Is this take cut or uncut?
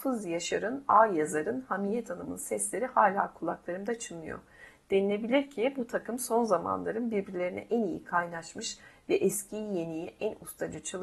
uncut